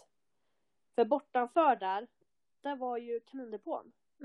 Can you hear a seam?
no; 0 cuts

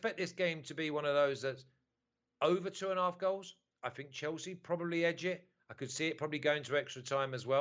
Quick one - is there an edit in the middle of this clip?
no; 0 cuts

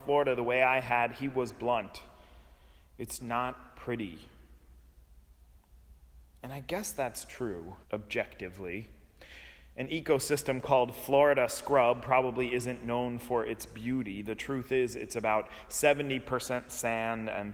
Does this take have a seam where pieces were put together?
yes; 2 cuts; at 3.2 s, 7.8 s

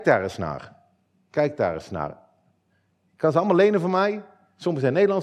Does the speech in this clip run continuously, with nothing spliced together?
yes; 0 cuts

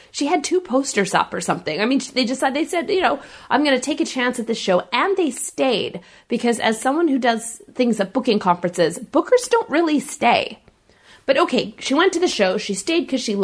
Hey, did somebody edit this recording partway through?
no; 0 cuts

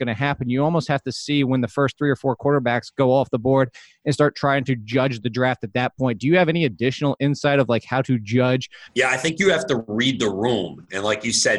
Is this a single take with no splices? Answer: no; 1 cut; at 8.9 s

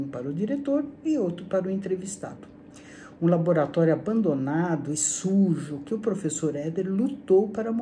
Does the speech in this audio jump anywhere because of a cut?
no; 0 cuts

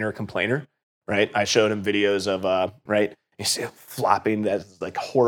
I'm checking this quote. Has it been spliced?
yes; 1 cut; at 2.9 s

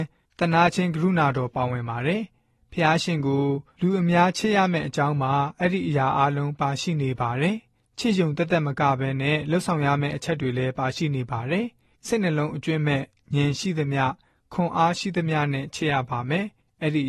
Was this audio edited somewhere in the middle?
no; 0 cuts

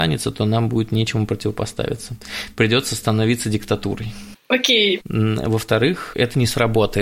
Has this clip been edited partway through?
yes; 2 cuts; at 5.0 s, 6.1 s

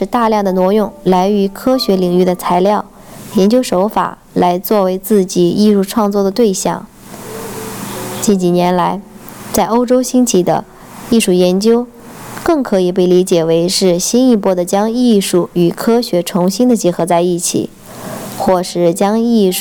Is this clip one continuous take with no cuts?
yes; 0 cuts

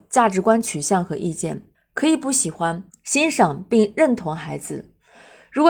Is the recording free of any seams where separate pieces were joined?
no; 2 cuts; at 1.7 s, 2.9 s

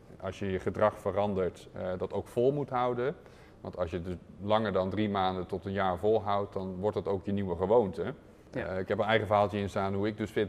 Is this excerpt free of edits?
no; 1 cut; at 8.5 s

